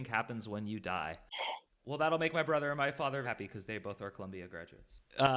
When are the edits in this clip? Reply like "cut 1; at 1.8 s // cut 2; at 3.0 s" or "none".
cut 1; at 1.7 s // cut 2; at 3.2 s